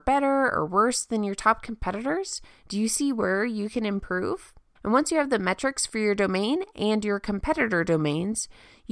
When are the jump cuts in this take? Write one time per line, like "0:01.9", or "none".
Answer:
0:04.8